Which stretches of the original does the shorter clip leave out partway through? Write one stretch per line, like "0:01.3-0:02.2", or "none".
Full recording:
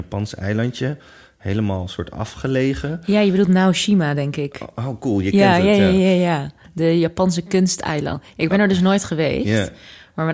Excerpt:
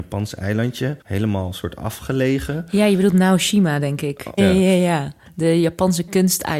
0:01.0-0:01.4
0:04.7-0:05.8